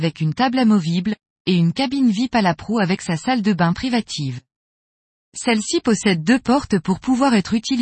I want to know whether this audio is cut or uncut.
uncut